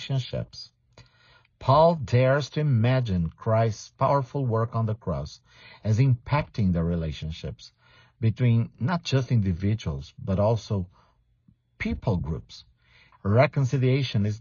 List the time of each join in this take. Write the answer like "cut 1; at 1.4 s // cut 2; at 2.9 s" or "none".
cut 1; at 13.1 s